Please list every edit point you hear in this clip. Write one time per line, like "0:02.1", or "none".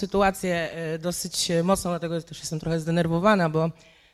none